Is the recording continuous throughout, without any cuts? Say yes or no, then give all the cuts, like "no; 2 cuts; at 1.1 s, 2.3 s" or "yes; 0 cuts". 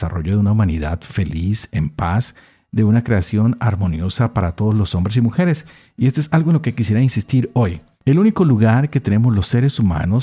yes; 0 cuts